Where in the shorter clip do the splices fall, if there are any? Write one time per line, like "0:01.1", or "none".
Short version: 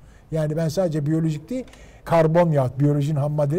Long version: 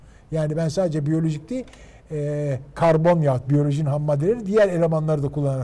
0:02.0

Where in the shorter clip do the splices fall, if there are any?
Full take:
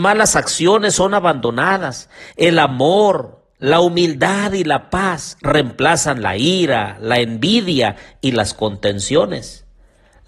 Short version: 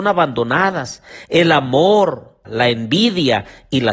0:02.4

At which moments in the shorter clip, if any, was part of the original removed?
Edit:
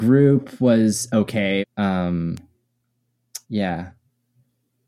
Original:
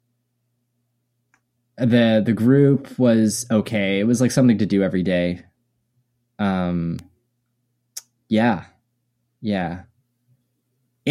0:01.6
0:03.4

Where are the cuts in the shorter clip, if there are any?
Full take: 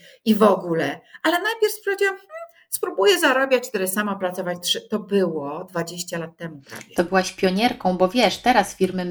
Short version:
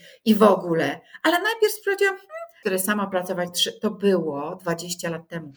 0:02.6

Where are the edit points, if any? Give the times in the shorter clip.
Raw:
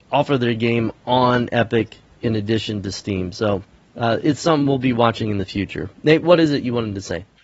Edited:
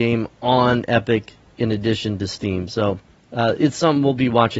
none

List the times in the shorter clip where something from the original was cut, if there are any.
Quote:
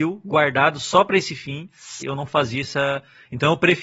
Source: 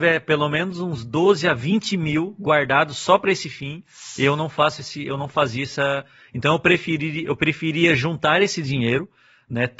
0:02.0

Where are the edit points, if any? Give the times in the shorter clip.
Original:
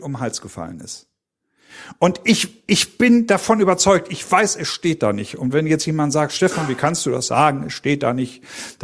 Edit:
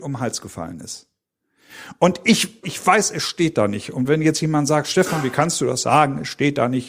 0:02.6

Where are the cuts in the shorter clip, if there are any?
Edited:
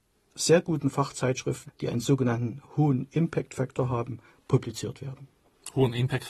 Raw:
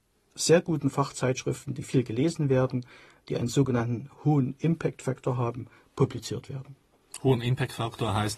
0:01.7

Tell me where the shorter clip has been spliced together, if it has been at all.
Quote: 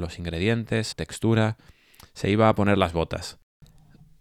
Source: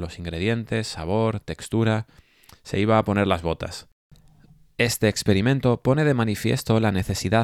0:00.9

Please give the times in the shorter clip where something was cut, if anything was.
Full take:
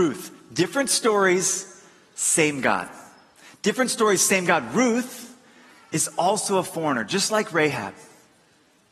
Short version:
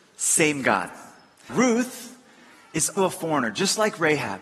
0:01.5
0:03.0

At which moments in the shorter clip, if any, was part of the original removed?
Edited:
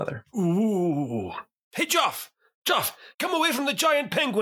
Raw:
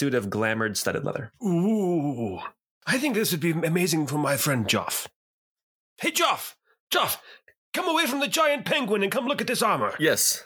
0:01.6
0:03.1

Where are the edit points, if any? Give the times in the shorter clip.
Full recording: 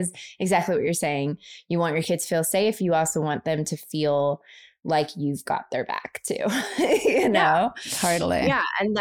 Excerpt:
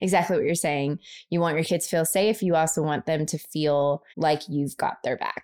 0:04.1

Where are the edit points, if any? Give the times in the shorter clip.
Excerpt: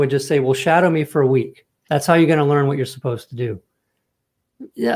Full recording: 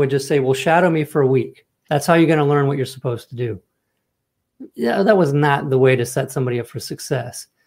none

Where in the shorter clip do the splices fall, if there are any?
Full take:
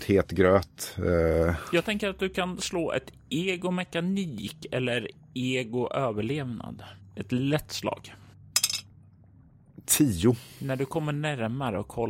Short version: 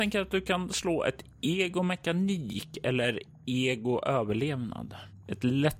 none

